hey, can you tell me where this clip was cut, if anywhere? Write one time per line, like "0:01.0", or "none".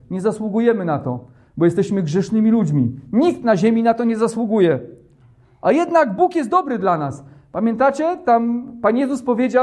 none